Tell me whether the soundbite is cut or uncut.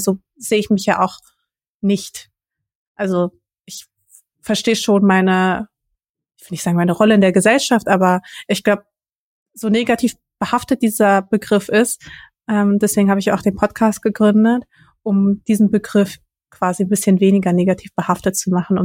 uncut